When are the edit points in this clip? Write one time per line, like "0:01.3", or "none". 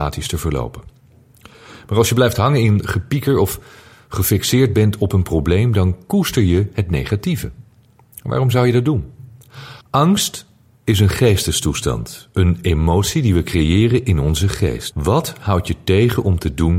0:09.8
0:14.9